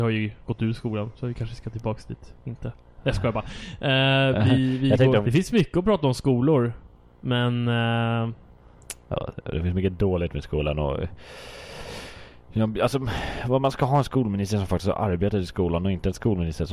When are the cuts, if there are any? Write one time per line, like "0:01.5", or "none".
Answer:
0:05.2